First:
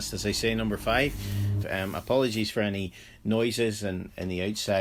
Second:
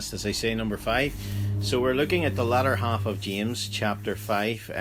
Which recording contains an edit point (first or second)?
first